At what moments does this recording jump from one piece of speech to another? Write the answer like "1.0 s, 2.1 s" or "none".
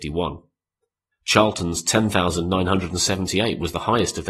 1.1 s